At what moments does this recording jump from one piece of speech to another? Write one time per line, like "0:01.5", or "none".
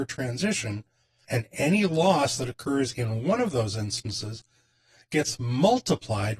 0:01.2